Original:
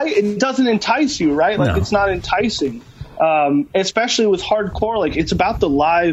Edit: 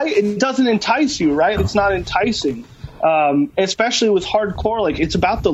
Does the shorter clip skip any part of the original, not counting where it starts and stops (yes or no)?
yes